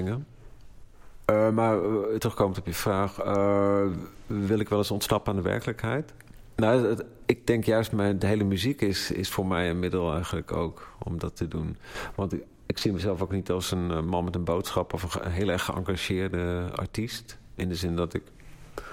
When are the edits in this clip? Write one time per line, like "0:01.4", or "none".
none